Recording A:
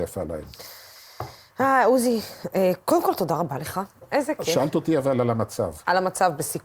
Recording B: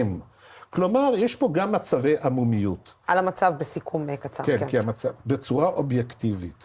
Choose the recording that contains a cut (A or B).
B